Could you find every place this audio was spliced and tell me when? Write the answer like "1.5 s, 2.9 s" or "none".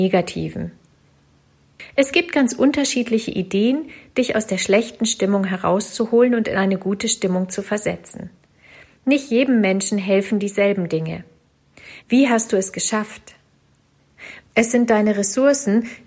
12.0 s, 14.4 s